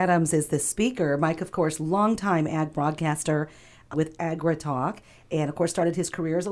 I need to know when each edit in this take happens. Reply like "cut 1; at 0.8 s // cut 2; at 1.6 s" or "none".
cut 1; at 3.9 s